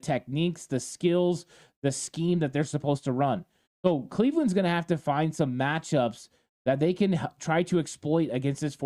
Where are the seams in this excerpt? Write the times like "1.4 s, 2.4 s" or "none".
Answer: 3.7 s

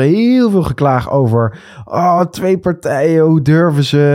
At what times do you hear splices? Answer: none

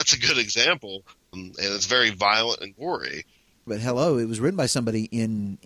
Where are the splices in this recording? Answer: 1.3 s, 3.7 s

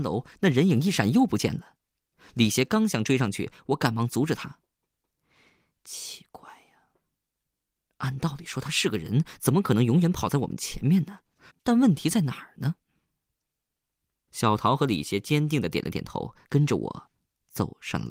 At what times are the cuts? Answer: 11.5 s, 14.3 s

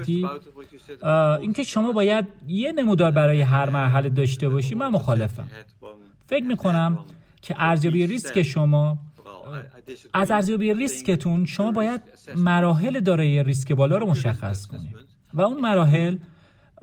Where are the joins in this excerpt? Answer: none

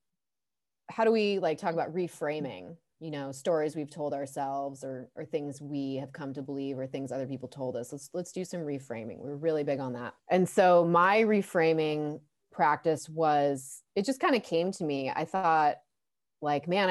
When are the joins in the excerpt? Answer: none

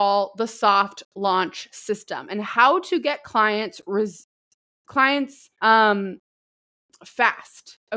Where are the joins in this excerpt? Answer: 5.5 s

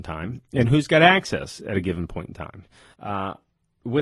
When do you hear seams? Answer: 2.9 s

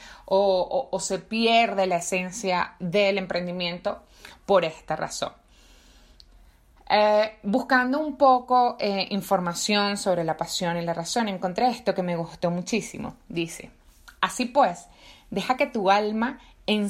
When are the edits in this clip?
none

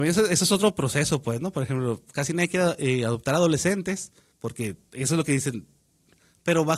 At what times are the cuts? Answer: 4.3 s

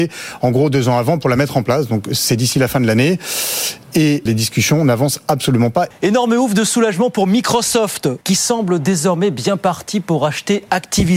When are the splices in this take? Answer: 4.3 s, 5.9 s, 8.2 s

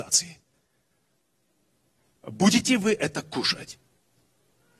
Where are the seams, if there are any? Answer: none

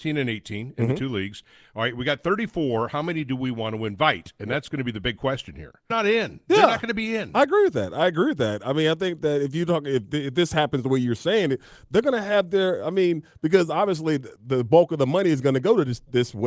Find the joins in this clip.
5.9 s

